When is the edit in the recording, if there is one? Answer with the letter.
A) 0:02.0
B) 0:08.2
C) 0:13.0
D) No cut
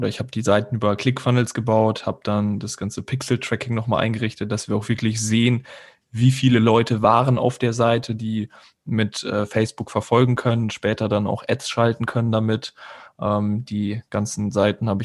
D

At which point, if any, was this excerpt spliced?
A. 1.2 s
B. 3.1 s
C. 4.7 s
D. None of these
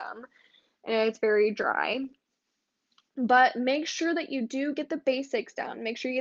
D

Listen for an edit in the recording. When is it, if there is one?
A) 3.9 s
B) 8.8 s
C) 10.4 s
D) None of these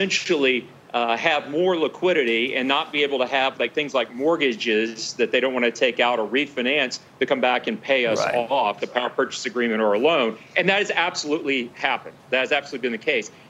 B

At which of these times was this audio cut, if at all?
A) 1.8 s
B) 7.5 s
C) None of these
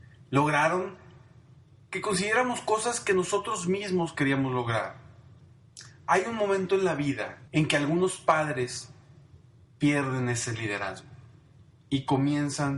B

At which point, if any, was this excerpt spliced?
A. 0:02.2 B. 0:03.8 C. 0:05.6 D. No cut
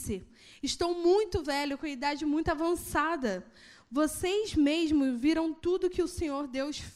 D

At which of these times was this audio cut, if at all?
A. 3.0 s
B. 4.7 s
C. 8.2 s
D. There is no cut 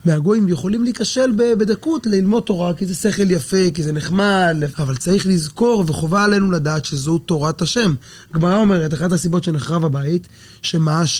B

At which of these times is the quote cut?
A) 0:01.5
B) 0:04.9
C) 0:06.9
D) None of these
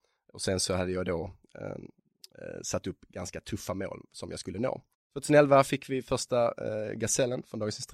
B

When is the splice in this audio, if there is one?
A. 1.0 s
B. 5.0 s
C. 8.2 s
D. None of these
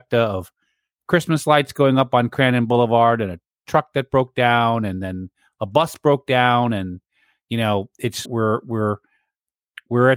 C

